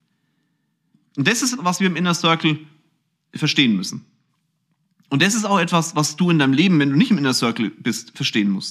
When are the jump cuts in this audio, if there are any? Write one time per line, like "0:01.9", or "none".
0:01.6